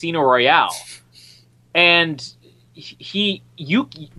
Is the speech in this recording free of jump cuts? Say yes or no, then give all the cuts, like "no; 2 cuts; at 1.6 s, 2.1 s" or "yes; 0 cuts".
yes; 0 cuts